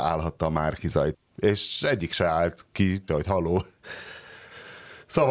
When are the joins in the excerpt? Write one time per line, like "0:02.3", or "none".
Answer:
0:01.1
0:03.1